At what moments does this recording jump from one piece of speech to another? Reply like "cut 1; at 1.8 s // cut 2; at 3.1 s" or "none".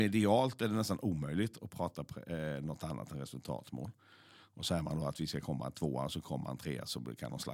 cut 1; at 4.4 s